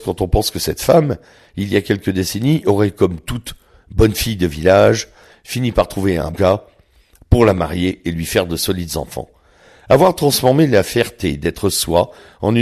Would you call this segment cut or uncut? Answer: cut